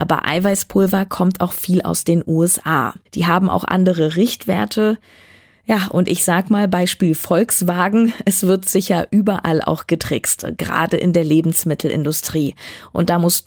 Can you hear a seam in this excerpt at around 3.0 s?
yes; 1 cut; at 3.0 s

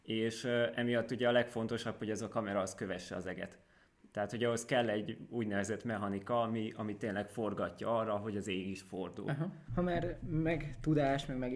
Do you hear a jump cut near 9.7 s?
yes; 1 cut; at 9.7 s

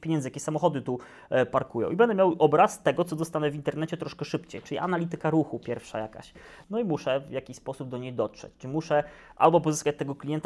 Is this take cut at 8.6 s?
no; 1 cut; at 6.6 s

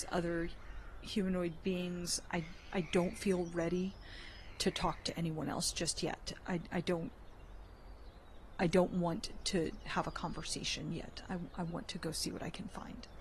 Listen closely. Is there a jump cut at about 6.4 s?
no; 0 cuts

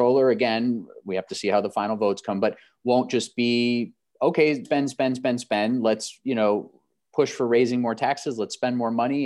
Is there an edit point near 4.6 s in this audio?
yes; 1 cut; at 4.6 s

